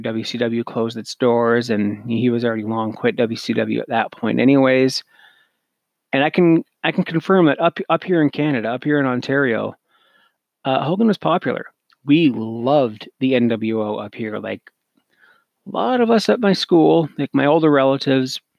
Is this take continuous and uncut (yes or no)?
yes